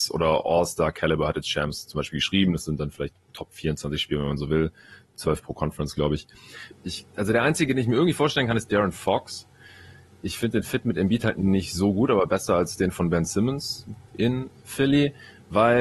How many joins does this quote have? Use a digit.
1